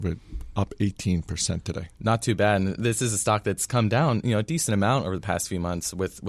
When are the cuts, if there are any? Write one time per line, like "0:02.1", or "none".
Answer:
none